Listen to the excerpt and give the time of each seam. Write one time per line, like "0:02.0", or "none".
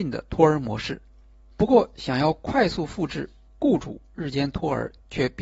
0:01.5

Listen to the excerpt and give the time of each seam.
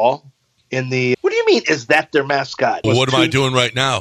0:01.1
0:02.8

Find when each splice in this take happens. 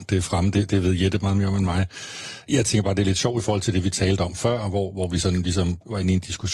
none

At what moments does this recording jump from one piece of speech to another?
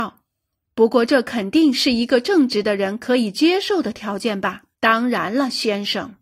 0:04.7

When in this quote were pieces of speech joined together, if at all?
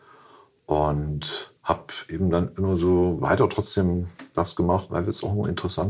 0:01.6
0:04.9

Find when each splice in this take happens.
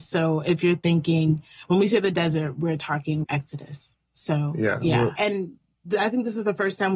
0:03.2
0:05.2

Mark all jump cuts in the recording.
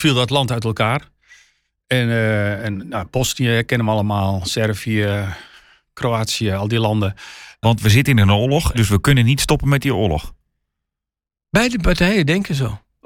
0:07.6
0:08.7

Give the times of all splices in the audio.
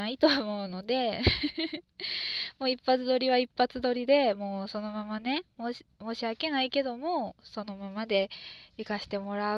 none

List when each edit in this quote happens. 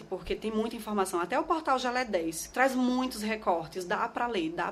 0:02.5

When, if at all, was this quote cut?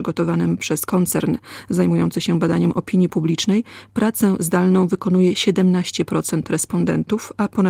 none

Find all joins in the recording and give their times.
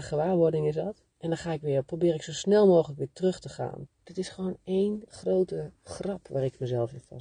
0:01.1
0:03.9

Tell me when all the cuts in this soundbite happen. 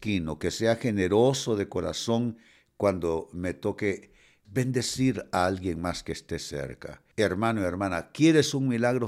0:04.4
0:07.1

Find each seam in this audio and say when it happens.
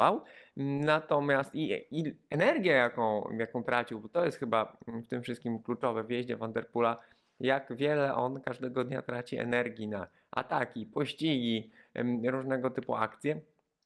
none

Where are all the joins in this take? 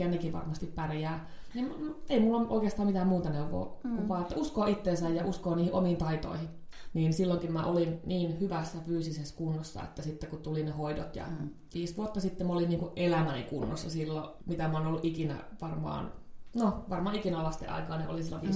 0:06.9
0:11.7
0:14.4

